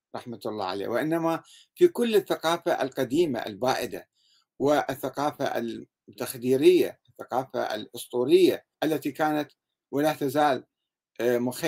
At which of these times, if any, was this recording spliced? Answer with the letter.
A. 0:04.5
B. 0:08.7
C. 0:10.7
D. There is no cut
B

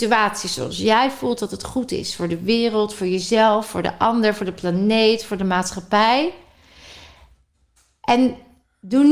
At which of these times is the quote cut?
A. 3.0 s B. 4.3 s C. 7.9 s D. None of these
D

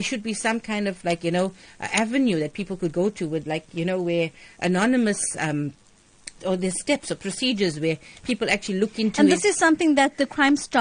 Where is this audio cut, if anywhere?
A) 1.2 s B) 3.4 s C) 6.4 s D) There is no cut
C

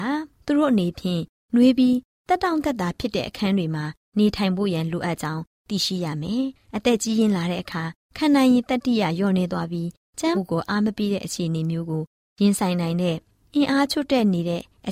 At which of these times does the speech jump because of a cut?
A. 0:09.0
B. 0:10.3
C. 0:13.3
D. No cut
B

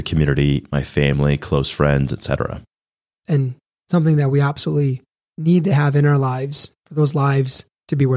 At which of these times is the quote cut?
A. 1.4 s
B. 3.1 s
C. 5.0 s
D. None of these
B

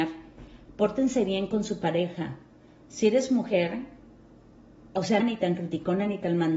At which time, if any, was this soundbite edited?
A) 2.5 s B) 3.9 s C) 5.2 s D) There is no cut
C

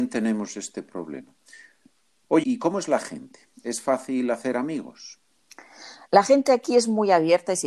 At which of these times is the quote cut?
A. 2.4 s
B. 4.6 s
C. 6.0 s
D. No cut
A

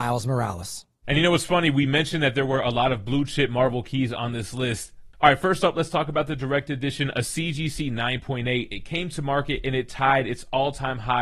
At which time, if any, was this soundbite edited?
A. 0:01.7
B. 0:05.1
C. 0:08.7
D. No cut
B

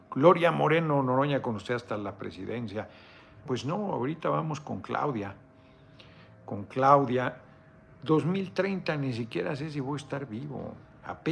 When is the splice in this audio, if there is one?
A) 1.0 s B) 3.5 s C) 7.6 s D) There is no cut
B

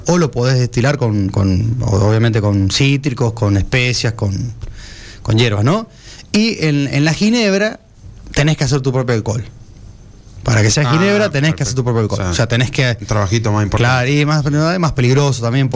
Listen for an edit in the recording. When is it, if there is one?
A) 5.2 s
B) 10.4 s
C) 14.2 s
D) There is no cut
D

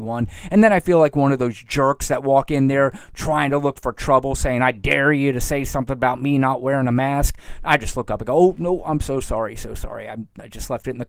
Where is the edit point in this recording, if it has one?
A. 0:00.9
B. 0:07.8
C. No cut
C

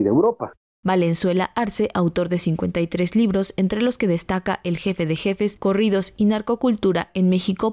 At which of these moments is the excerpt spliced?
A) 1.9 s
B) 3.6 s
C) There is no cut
C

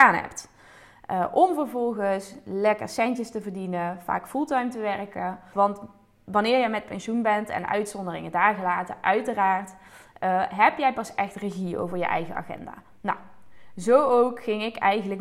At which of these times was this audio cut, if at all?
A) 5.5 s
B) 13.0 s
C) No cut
A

